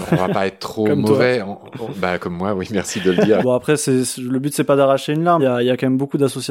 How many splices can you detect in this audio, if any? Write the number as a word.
two